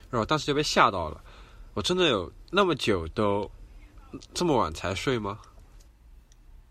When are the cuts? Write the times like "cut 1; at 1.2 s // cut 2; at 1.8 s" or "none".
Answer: none